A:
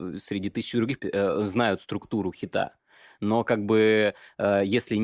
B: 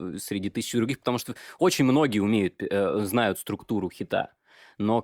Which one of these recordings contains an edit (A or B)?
A